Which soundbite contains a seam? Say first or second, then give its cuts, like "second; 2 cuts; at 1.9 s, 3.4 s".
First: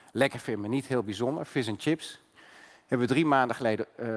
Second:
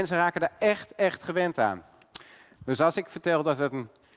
second; 1 cut; at 2.5 s